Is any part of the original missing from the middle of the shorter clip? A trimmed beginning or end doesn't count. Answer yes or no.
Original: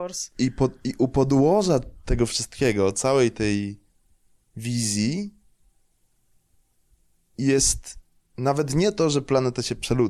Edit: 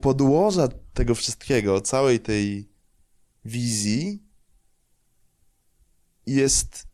no